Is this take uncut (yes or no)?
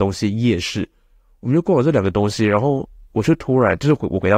yes